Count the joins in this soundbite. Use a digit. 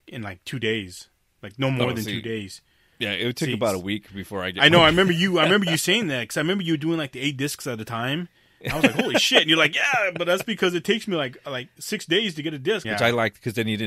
1